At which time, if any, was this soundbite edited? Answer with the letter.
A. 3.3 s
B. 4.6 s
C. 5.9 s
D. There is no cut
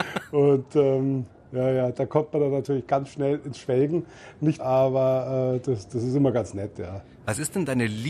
B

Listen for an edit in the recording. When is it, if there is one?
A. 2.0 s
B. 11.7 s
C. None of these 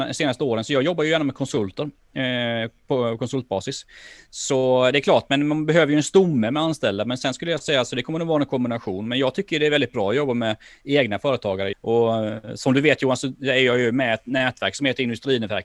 B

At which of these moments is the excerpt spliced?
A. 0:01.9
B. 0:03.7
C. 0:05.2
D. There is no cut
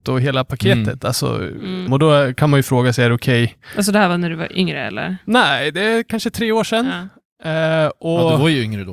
A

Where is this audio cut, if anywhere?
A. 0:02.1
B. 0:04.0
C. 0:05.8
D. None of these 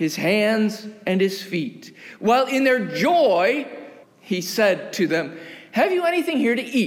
B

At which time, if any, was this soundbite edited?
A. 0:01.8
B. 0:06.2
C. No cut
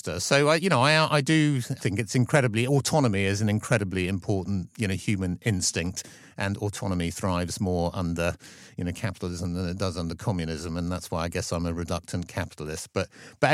A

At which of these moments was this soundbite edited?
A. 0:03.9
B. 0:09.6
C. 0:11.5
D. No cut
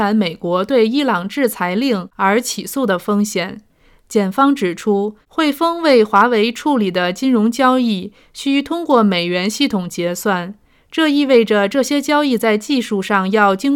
D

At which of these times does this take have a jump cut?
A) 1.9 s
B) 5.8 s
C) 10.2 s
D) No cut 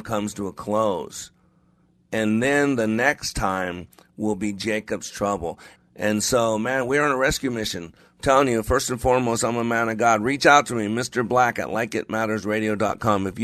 B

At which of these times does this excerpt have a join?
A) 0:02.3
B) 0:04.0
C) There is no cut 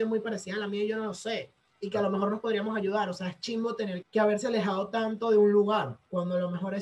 B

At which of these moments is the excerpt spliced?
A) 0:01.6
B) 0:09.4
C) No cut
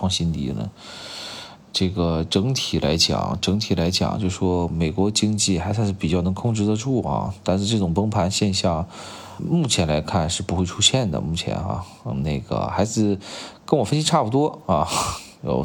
B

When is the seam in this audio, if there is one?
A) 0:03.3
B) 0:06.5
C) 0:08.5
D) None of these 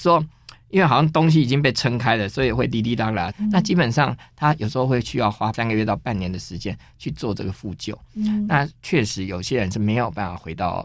A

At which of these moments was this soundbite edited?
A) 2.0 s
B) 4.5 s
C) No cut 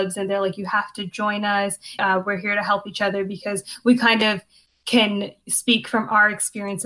A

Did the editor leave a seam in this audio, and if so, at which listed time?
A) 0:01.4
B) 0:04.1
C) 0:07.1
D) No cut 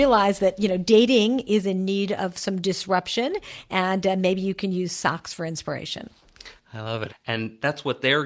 C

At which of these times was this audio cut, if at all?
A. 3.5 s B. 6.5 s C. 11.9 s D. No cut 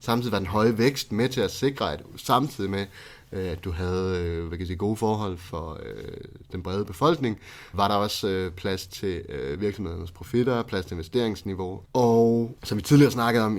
B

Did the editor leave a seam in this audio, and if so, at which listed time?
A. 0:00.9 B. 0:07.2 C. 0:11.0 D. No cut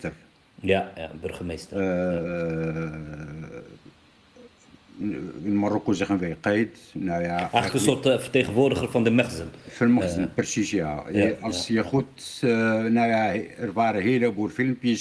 A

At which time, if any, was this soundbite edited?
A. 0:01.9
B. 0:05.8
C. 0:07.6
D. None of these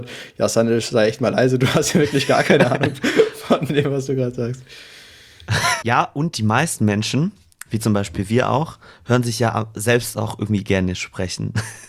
B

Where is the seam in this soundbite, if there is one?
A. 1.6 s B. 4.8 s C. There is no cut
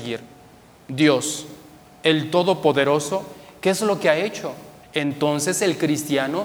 B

